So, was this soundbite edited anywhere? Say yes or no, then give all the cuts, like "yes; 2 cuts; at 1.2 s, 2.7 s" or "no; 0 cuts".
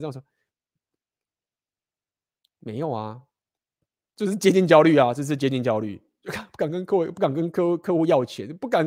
no; 0 cuts